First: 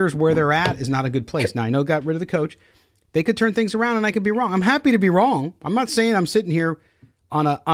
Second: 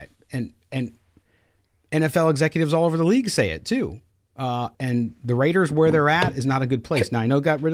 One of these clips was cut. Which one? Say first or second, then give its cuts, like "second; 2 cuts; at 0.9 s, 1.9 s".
second; 1 cut; at 4.7 s